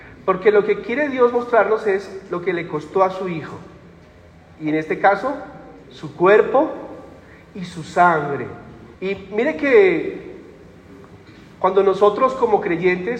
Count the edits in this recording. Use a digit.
2